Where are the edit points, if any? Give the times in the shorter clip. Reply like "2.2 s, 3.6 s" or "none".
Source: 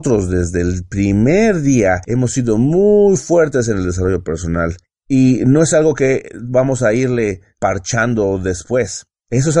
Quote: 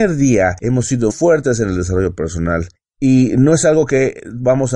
1.1 s